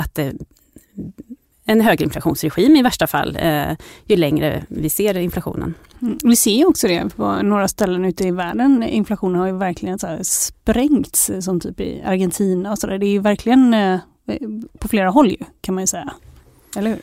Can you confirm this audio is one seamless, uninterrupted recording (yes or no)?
yes